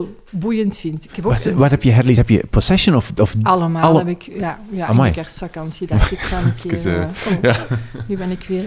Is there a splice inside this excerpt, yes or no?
no